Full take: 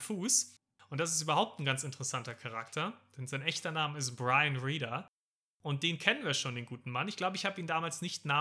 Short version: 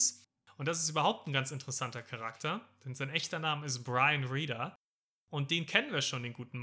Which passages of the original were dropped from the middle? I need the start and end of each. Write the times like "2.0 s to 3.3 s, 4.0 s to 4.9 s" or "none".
none

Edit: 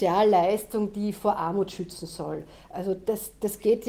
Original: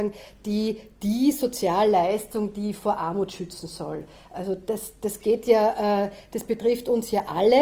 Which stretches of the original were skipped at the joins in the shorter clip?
none

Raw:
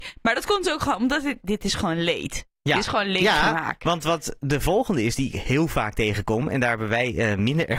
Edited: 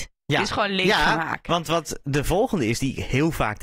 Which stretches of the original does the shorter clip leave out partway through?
none

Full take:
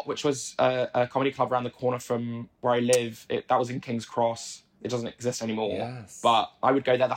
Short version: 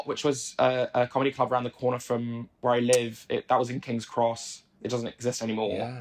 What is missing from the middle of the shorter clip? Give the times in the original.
none

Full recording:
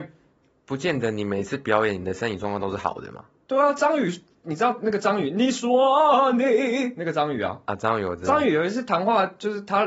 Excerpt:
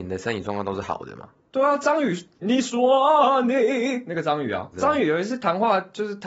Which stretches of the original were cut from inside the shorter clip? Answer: 4.4 s to 5.3 s, 7.6 s to 8.2 s

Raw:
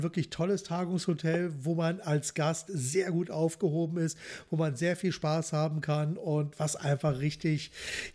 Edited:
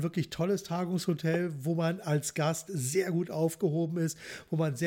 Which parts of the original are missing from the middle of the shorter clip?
none

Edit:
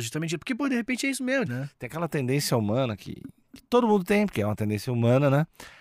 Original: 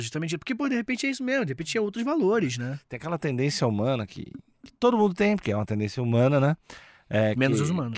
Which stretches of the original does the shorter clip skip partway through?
1.5 s to 2.6 s

